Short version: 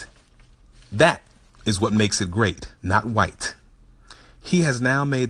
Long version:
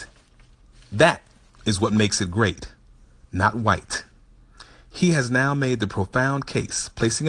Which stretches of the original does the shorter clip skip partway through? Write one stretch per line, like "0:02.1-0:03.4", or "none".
0:02.8-0:03.3